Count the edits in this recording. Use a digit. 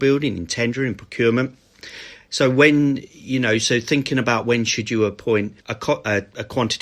1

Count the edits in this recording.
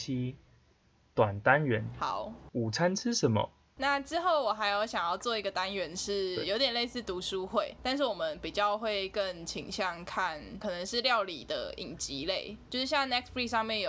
0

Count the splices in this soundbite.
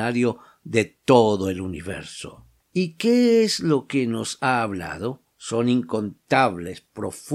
2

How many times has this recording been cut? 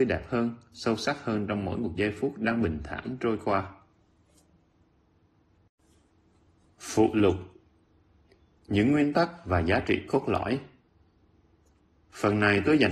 0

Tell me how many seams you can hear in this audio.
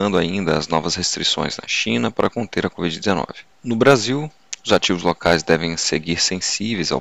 1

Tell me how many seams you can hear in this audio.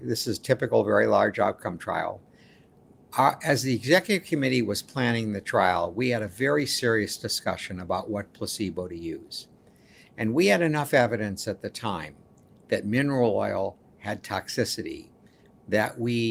0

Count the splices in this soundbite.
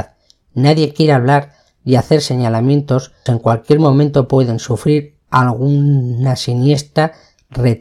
1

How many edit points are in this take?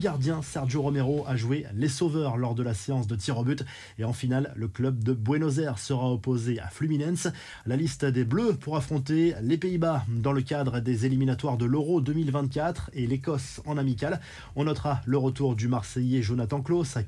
0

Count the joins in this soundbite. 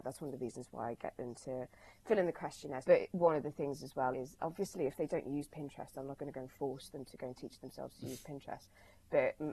2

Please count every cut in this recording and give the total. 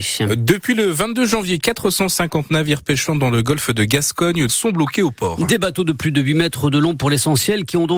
1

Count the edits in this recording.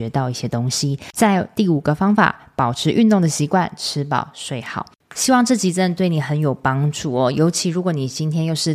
0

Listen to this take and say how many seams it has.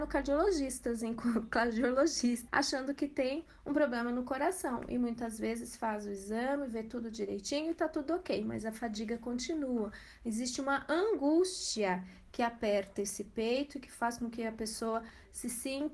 1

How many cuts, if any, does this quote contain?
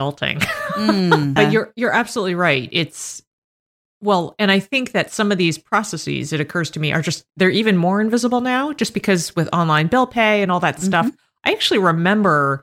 1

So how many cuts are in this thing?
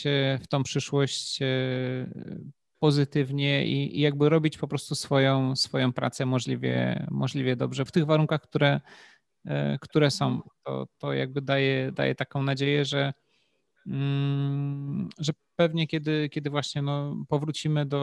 1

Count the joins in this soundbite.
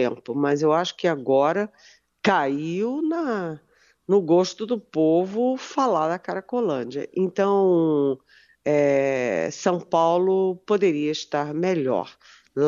0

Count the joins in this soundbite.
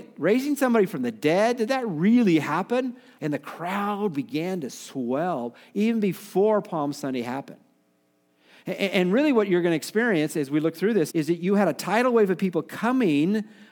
2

